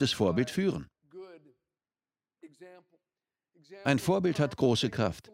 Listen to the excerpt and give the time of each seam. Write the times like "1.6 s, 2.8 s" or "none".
none